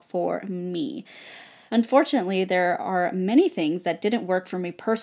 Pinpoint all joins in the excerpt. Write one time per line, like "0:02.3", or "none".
0:01.7